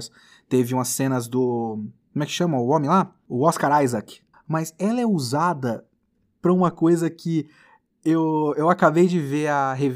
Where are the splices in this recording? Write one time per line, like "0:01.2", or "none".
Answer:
0:04.3

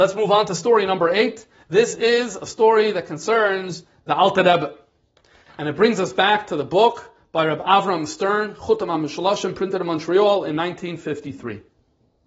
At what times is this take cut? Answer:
none

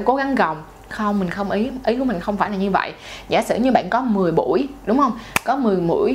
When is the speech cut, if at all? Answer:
none

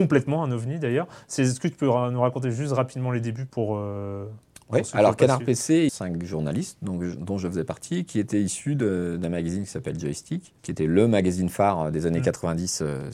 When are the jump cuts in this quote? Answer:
0:05.9
0:10.6

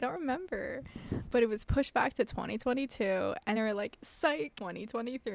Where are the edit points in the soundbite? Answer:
0:03.6

